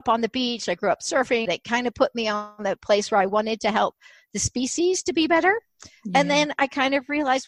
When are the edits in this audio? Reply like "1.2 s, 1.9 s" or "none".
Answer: 1.5 s